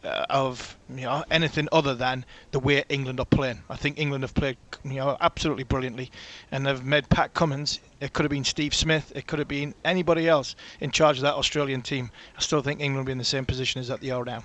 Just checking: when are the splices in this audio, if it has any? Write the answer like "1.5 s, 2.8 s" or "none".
none